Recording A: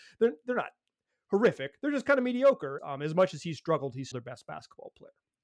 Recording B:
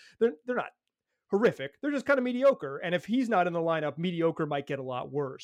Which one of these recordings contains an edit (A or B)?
A